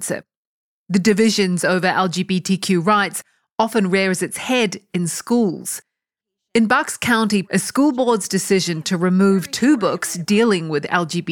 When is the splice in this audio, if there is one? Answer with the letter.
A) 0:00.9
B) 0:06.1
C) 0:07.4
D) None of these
C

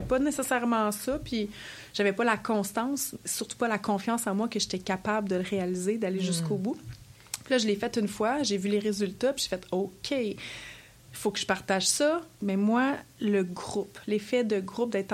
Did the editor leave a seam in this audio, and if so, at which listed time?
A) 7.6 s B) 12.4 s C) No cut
B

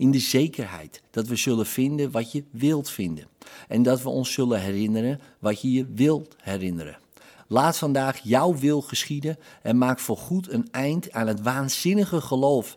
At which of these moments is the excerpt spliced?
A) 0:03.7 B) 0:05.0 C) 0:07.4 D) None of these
C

